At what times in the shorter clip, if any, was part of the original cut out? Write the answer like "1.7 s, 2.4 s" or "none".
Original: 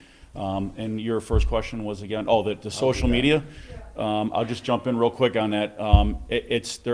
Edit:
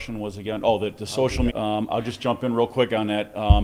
1.5 s